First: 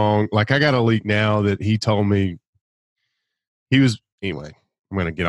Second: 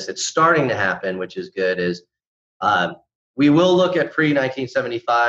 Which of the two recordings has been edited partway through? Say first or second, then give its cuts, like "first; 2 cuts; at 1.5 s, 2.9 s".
first; 1 cut; at 4.1 s